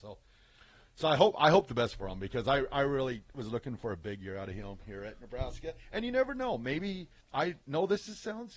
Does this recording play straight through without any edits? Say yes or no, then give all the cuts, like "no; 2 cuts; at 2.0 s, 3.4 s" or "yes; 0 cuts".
no; 1 cut; at 7.2 s